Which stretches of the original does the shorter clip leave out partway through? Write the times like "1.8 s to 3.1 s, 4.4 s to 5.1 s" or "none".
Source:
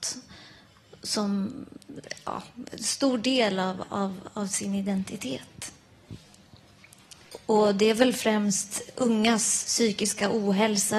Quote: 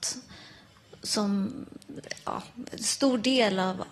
none